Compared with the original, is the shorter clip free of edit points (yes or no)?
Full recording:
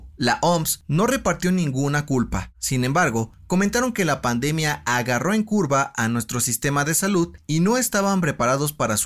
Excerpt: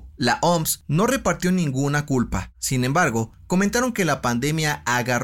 yes